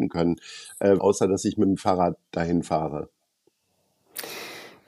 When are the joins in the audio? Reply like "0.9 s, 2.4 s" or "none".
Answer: 1.0 s